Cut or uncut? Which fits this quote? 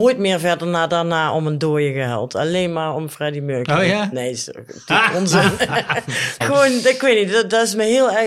cut